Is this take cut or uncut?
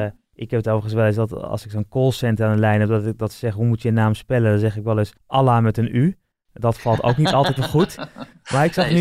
cut